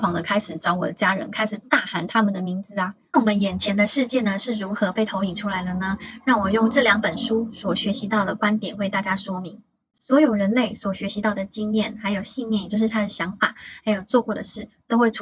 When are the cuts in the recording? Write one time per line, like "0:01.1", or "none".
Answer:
0:03.1